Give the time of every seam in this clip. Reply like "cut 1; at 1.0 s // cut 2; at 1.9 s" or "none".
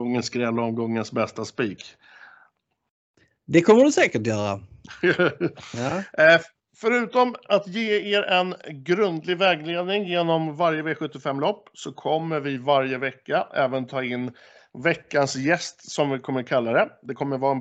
none